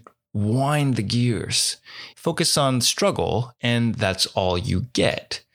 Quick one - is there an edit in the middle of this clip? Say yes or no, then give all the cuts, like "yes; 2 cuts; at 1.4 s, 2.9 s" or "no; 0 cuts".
yes; 1 cut; at 2.1 s